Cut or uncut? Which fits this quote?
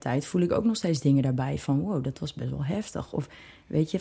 uncut